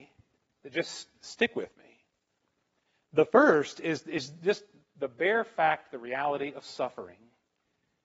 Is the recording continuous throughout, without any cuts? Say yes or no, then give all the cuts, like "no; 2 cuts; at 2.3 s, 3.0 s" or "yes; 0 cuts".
yes; 0 cuts